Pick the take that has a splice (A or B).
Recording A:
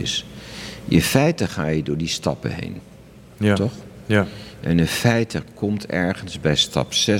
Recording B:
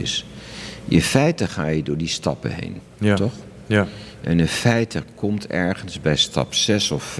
B